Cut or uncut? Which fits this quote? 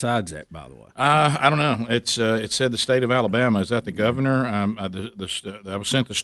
uncut